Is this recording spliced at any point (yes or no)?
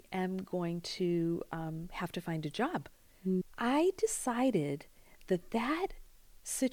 yes